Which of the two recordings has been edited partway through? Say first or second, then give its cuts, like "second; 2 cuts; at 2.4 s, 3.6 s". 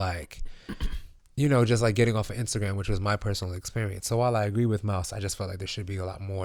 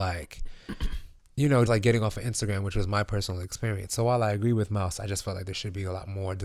second; 1 cut; at 1.7 s